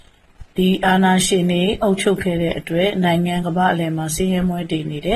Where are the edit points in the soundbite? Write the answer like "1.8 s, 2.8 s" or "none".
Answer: 3.4 s